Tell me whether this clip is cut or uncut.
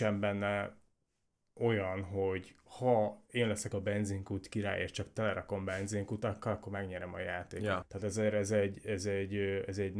cut